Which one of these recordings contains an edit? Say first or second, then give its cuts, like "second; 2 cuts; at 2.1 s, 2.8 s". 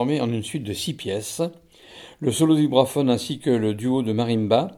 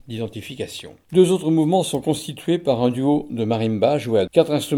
second; 1 cut; at 1.0 s